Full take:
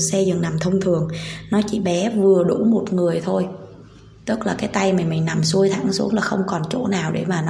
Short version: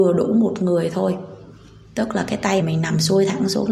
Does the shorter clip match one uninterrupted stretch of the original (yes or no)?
no